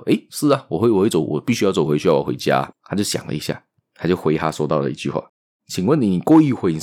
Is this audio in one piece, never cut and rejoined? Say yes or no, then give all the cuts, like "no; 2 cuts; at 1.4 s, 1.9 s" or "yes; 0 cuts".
no; 2 cuts; at 2.7 s, 5.6 s